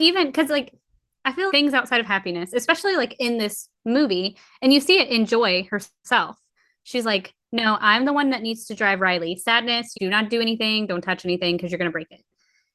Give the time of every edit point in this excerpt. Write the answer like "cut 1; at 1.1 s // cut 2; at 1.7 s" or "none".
cut 1; at 1.5 s // cut 2; at 9.9 s